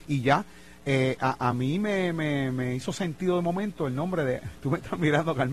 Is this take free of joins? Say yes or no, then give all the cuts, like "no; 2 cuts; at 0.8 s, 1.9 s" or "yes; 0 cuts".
yes; 0 cuts